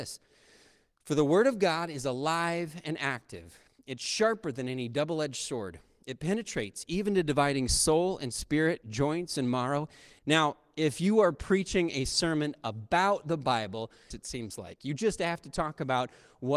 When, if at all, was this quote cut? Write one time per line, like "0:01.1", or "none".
0:10.2
0:14.1